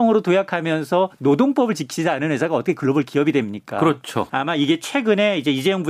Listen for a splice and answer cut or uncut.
cut